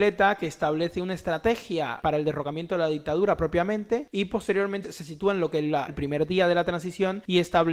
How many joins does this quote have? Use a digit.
2